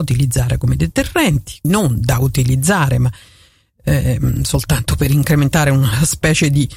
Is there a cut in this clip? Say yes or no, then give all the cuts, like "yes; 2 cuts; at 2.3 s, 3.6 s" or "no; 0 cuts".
yes; 1 cut; at 1.6 s